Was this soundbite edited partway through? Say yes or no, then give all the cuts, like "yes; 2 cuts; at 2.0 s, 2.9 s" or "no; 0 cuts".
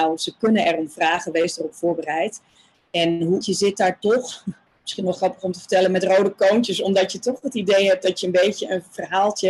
yes; 1 cut; at 3.4 s